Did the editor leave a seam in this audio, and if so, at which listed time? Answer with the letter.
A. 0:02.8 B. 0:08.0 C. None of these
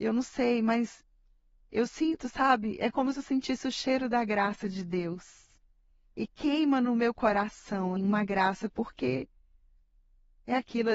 B